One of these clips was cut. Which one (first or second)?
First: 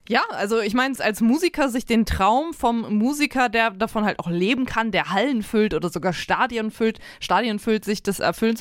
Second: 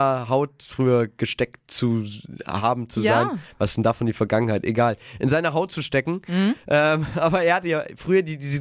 first